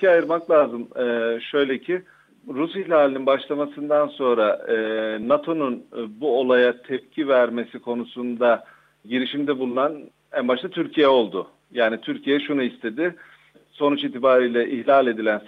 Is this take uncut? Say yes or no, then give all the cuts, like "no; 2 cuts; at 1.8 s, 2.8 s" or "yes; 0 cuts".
yes; 0 cuts